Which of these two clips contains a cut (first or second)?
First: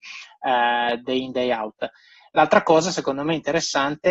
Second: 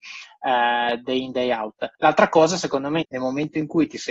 second